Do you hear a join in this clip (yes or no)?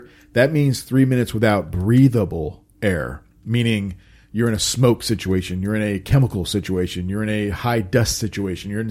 no